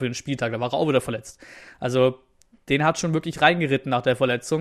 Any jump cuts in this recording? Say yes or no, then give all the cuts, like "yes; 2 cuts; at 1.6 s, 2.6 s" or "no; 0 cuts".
no; 0 cuts